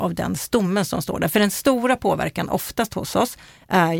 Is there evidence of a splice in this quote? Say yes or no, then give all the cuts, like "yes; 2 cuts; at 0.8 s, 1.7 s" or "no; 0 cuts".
no; 0 cuts